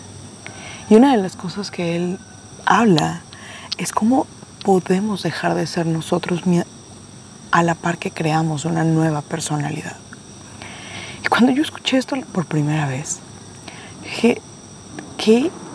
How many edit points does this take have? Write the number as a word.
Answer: zero